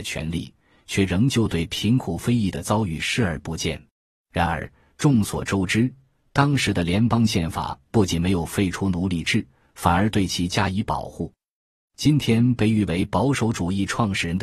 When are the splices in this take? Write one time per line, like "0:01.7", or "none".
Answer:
0:03.9
0:11.5